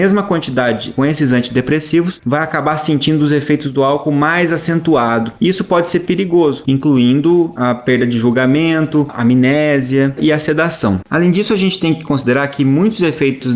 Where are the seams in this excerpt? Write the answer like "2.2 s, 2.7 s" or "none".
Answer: 6.7 s